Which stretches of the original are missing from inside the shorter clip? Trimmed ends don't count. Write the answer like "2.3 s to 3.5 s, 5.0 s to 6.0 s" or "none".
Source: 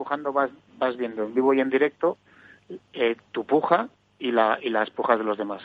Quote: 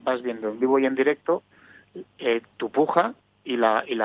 none

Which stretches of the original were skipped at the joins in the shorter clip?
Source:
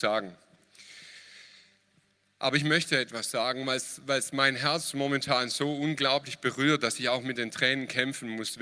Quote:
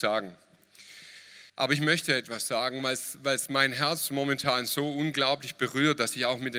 1.5 s to 2.3 s

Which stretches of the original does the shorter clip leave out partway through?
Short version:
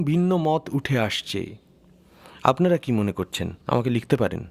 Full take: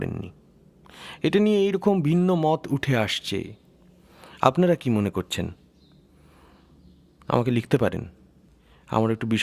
5.6 s to 7.2 s

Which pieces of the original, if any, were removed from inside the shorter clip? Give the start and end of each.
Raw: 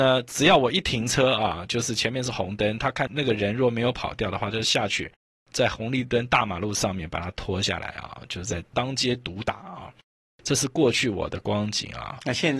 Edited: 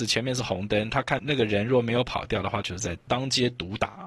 4.5 s to 8.3 s

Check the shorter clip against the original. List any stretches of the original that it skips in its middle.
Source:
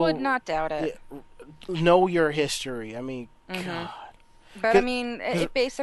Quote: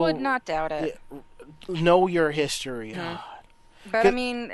2.9 s to 3.6 s

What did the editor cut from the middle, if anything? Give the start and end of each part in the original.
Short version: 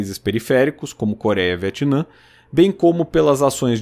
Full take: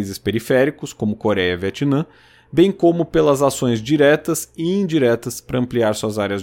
none

